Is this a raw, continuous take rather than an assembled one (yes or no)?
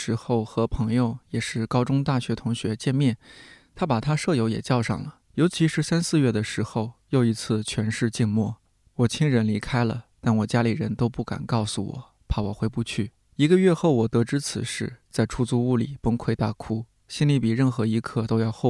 no